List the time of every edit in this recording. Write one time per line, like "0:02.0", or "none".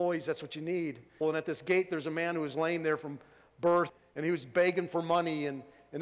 0:01.2